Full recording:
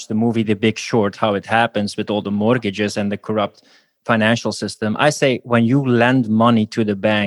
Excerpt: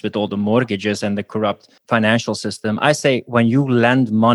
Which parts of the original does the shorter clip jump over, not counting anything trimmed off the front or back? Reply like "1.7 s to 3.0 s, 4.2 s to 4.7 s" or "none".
3.7 s to 3.9 s